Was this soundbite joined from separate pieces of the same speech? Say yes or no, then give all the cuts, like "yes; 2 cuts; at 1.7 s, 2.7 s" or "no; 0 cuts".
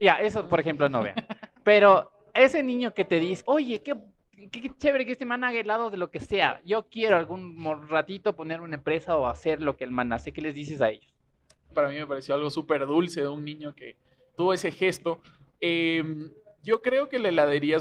yes; 3 cuts; at 3.4 s, 11.7 s, 14.4 s